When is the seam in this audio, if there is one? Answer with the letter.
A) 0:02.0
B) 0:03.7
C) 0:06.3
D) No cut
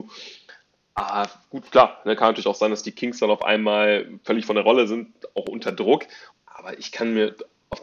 C